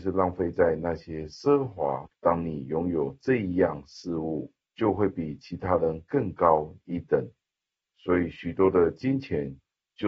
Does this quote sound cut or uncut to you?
cut